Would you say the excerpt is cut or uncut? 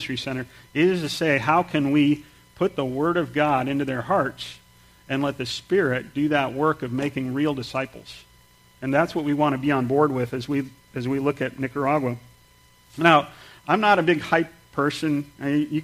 uncut